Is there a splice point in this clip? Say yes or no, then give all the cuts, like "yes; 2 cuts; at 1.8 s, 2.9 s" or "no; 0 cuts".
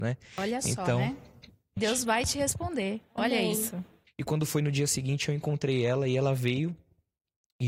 yes; 2 cuts; at 1.8 s, 4.1 s